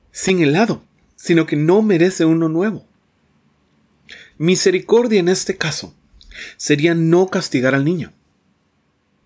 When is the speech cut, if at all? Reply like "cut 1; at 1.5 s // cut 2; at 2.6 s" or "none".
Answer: cut 1; at 4.3 s